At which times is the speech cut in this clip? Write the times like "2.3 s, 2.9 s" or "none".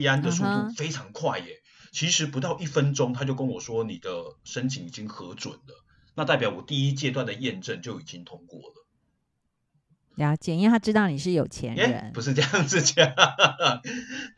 none

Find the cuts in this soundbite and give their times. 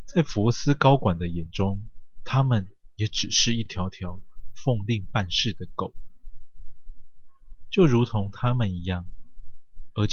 none

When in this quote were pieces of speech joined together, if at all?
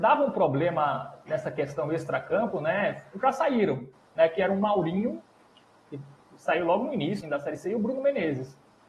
7.2 s

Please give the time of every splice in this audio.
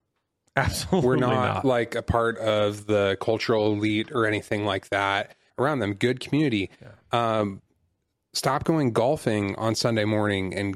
5.5 s

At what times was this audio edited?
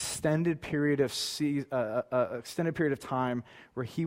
none

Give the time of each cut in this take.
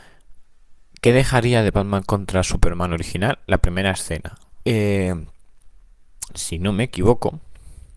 4.6 s, 6.3 s

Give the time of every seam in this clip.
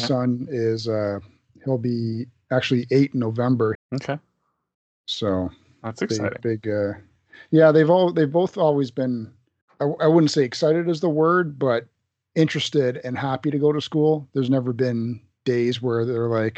3.7 s

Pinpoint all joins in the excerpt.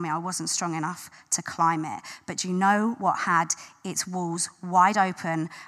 none

